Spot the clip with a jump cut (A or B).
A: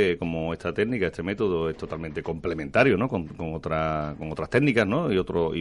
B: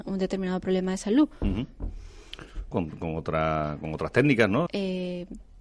B